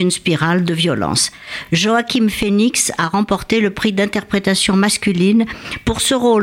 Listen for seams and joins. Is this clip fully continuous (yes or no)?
yes